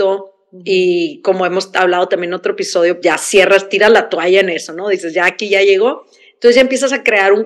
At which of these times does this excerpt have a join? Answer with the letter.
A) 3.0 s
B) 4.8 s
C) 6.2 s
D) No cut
A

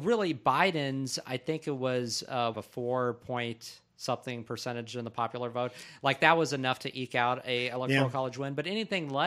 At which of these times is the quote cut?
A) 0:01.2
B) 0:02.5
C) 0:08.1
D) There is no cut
B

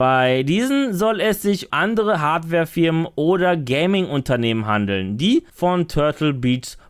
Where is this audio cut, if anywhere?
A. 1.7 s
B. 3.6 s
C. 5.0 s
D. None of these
A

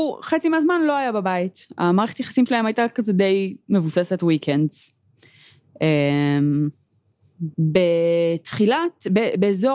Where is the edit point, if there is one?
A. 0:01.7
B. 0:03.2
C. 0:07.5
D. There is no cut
C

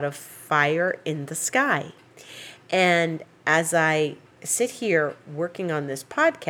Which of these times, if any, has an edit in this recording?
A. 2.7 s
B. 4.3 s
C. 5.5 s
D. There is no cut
B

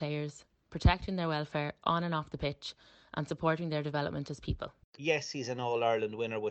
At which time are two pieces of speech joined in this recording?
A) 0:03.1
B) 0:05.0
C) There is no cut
B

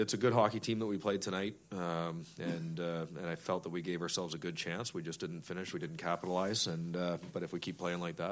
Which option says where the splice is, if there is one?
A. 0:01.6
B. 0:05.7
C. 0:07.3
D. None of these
D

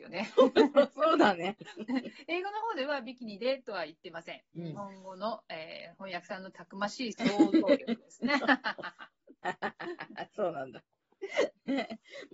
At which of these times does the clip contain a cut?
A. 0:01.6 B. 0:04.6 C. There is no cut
A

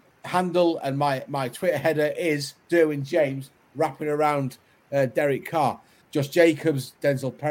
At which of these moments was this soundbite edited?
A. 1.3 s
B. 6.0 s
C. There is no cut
B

